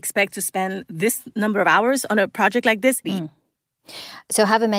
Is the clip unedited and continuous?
no; 1 cut; at 3.0 s

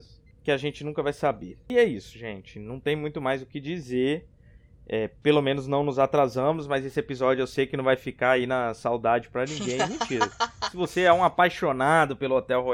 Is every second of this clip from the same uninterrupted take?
yes; 0 cuts

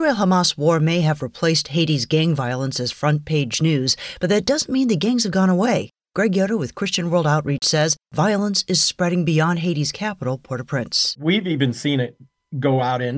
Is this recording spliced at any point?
no; 0 cuts

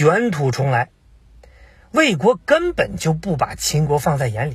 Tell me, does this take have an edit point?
no; 0 cuts

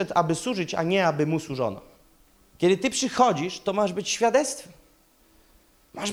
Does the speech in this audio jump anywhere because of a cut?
yes; 1 cut; at 2.5 s

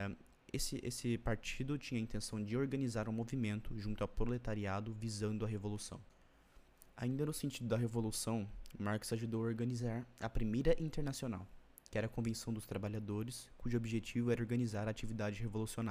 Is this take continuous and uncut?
yes; 0 cuts

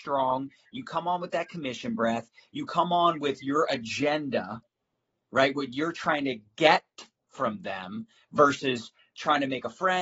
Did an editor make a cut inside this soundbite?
no; 0 cuts

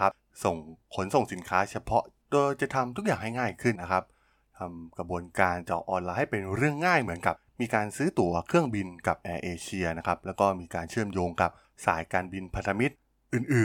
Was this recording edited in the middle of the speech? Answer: yes; 1 cut; at 3.8 s

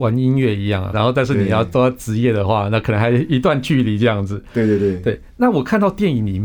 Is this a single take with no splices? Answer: no; 1 cut; at 0.9 s

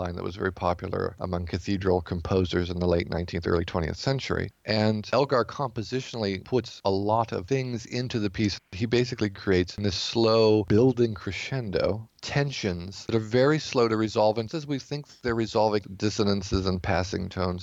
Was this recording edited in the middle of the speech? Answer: yes; 2 cuts; at 14.5 s, 15.8 s

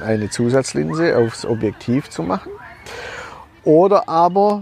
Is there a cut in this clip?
no; 0 cuts

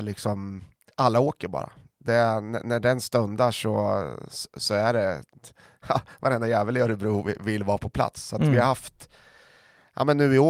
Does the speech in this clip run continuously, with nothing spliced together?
yes; 0 cuts

